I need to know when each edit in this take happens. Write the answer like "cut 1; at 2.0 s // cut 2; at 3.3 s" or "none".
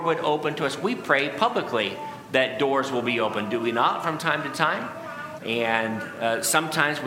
cut 1; at 5.4 s